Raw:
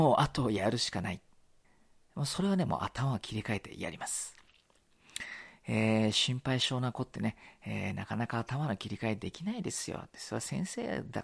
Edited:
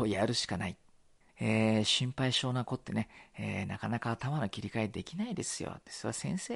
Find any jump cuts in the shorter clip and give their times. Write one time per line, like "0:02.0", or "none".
0:01.3